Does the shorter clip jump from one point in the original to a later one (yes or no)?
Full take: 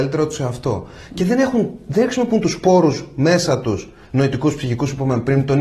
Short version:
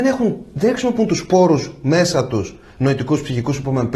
no